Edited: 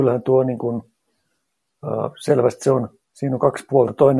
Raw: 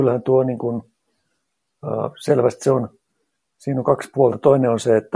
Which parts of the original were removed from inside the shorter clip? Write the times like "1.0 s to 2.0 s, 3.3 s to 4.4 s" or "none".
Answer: 3.0 s to 3.5 s